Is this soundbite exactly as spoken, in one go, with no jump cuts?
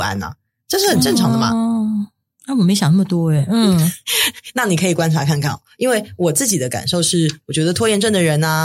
yes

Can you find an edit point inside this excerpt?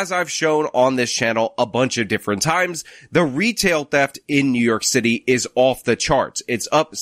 no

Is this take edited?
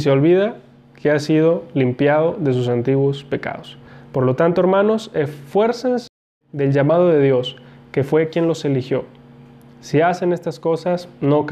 no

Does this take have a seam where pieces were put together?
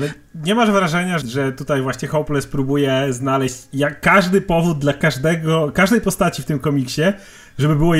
yes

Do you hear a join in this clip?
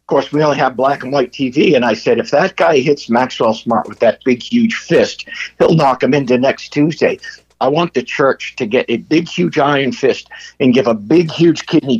yes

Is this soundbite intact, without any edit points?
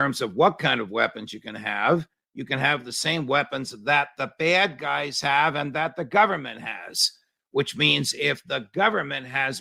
yes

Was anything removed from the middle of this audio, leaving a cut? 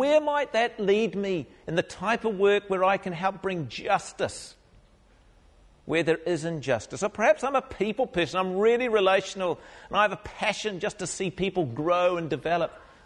no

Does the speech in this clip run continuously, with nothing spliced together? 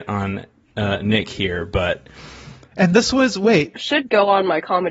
no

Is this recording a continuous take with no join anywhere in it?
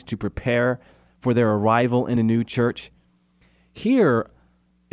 yes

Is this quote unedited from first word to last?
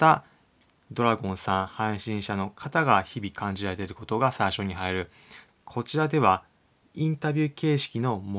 no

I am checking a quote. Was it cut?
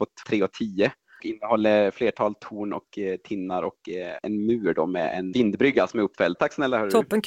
yes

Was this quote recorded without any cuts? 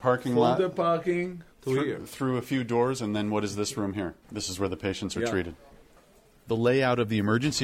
no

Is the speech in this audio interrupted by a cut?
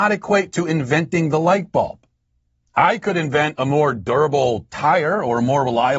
no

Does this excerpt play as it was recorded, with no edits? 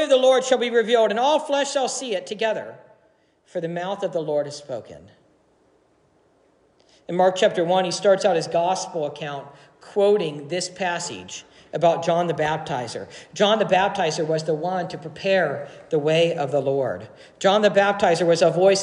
yes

